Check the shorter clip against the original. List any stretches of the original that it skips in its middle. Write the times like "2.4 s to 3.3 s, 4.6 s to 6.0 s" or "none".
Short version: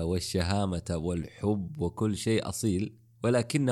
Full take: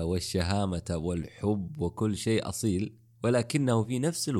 none